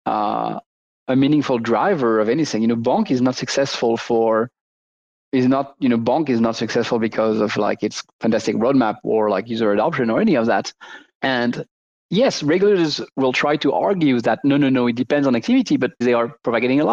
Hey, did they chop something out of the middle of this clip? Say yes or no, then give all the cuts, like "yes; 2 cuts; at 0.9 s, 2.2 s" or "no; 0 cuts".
yes; 2 cuts; at 11.2 s, 16.0 s